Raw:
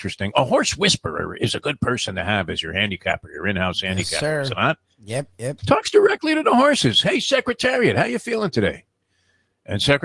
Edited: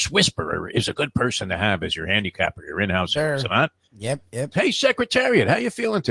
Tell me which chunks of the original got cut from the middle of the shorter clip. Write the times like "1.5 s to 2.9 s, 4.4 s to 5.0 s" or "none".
3.8 s to 4.2 s, 5.6 s to 7.0 s